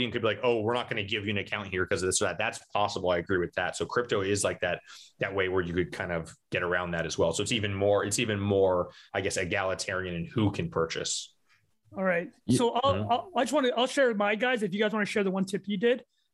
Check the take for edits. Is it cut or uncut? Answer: uncut